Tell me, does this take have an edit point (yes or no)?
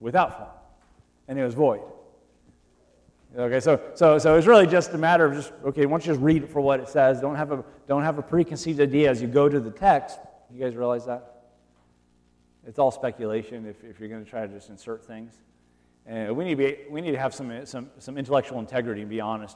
yes